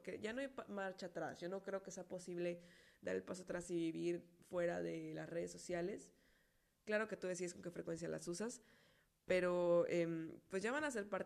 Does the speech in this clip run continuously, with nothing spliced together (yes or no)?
yes